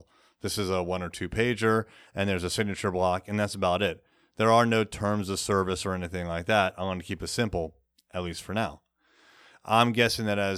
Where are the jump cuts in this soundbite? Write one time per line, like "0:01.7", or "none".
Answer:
none